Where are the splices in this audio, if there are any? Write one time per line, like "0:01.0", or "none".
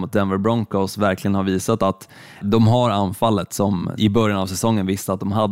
0:02.4
0:04.0